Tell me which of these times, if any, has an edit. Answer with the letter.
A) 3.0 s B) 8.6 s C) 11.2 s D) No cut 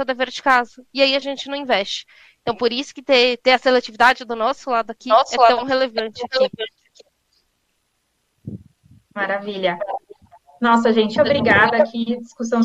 C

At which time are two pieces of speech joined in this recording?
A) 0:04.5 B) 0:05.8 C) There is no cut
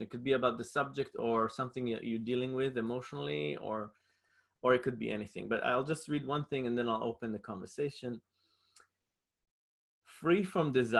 C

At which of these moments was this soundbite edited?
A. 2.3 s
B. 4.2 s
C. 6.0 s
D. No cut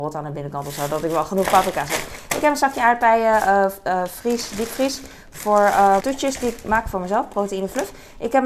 C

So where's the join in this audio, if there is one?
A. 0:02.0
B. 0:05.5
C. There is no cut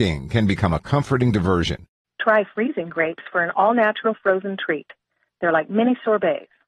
A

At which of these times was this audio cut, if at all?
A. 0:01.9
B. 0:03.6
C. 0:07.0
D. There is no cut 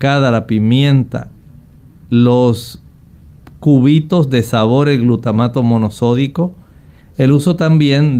C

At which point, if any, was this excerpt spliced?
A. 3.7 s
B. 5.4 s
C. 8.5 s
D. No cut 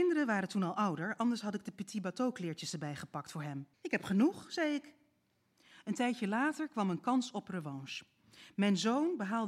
A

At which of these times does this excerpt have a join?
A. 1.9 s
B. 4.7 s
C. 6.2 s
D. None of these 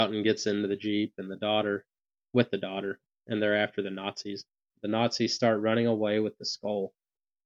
B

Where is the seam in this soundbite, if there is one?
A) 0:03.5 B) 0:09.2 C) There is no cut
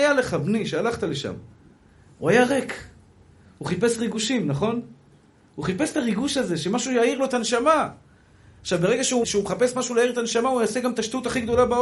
B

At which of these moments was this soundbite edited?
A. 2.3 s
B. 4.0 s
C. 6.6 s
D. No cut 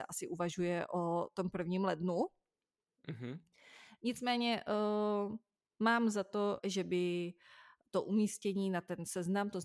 C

